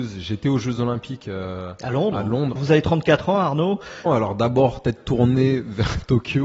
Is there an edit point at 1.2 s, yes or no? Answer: no